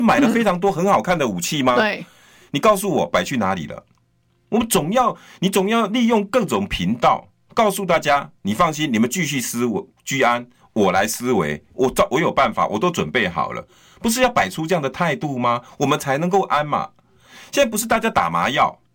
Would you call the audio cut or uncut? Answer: uncut